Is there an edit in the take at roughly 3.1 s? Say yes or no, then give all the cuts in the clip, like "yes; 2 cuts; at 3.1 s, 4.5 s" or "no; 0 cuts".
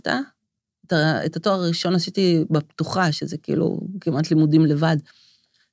no; 0 cuts